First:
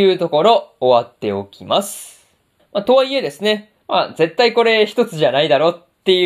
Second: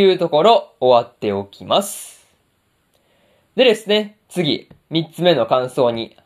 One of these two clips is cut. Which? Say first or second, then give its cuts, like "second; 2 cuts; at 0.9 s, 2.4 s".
first; 2 cuts; at 2.6 s, 3.8 s